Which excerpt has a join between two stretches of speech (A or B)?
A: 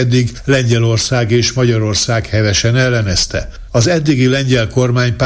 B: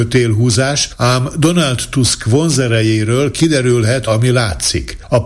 B